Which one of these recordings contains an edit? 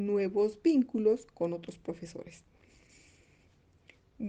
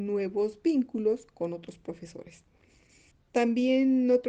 second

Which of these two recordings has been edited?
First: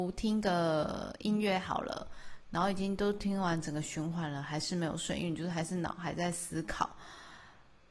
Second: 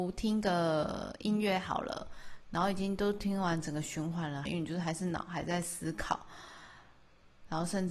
second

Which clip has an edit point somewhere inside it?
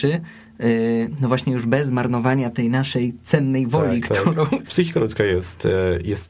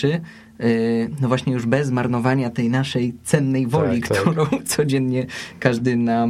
first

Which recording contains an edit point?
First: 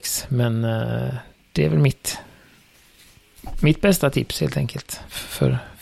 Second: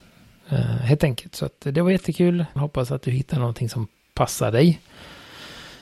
second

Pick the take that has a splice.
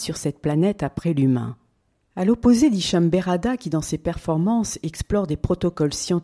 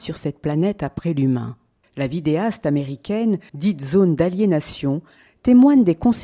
second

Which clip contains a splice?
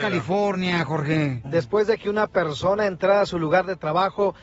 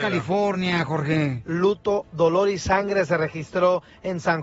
first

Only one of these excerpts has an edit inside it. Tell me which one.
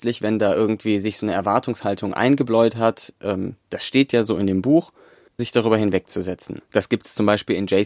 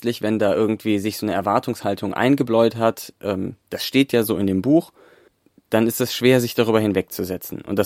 first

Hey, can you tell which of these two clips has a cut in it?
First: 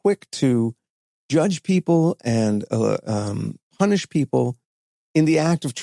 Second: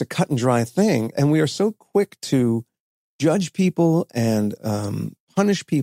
second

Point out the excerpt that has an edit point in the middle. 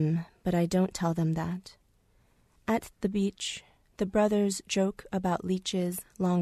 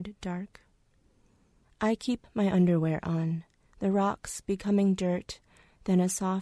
second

